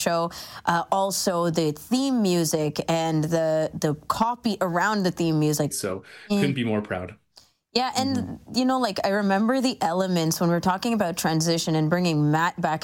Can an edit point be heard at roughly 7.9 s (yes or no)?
no